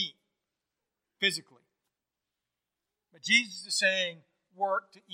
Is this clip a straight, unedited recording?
yes; 0 cuts

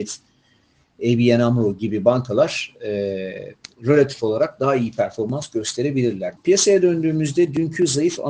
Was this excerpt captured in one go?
no; 1 cut; at 6.4 s

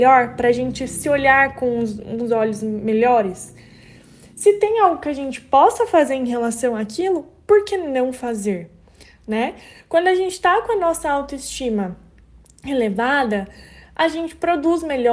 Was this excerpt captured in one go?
yes; 0 cuts

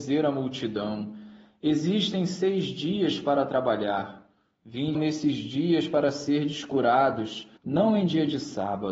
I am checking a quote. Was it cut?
yes; 2 cuts; at 4.9 s, 7.6 s

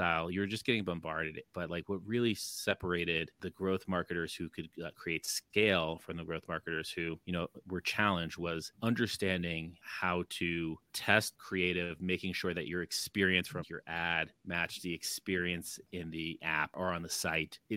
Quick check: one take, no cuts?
no; 1 cut; at 13.6 s

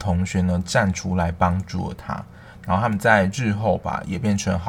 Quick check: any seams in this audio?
no; 0 cuts

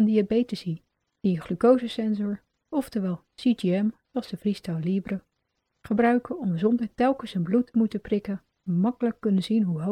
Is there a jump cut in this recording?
no; 0 cuts

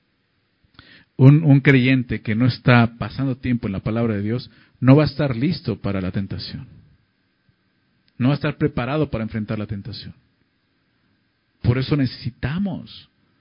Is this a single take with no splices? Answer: yes; 0 cuts

